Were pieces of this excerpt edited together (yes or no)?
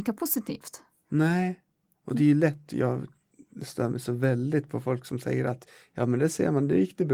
no